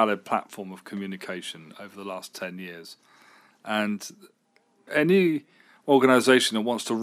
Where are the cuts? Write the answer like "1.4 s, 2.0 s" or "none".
4.9 s